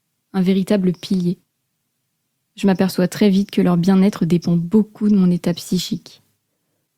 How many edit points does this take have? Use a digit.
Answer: 0